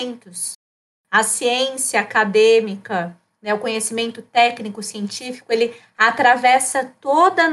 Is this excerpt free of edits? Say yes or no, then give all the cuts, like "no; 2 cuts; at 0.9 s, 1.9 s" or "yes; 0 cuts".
yes; 0 cuts